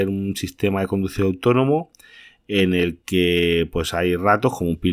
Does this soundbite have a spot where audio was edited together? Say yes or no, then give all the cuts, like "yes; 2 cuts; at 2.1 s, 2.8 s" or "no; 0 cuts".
no; 0 cuts